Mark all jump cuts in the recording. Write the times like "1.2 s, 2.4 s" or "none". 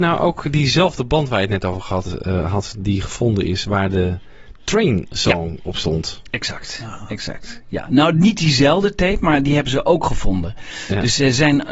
none